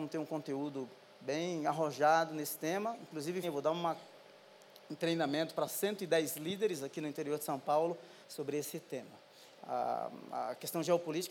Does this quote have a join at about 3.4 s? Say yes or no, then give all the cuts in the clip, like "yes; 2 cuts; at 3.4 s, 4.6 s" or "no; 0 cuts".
yes; 3 cuts; at 3.4 s, 8.2 s, 9.6 s